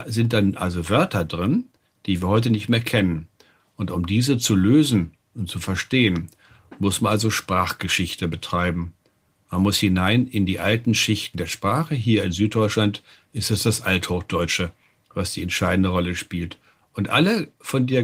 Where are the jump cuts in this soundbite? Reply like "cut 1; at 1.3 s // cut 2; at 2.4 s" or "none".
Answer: none

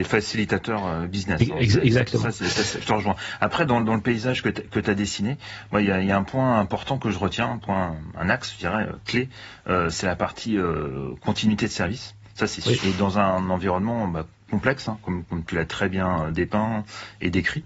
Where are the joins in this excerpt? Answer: cut 1; at 12.8 s

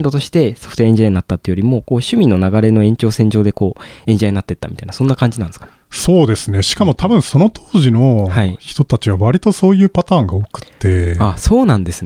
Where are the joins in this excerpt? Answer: none

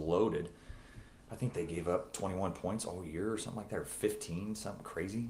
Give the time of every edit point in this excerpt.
none

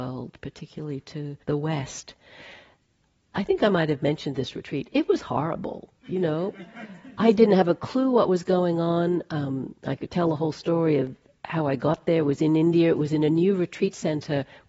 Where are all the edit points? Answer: cut 1; at 1.4 s

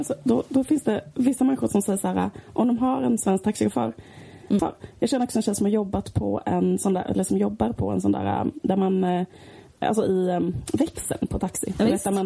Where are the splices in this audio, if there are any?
cut 1; at 4.6 s

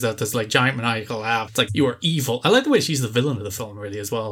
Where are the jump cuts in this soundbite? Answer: cut 1; at 1.7 s

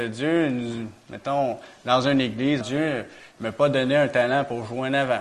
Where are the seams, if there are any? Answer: cut 1; at 2.6 s

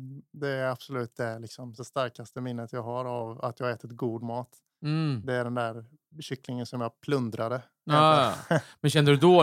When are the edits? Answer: cut 1; at 1.8 s

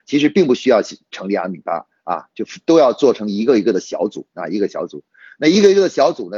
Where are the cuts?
none

